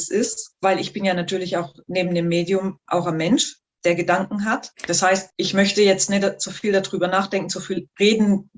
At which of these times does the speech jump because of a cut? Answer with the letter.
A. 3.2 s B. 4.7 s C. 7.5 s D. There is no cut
B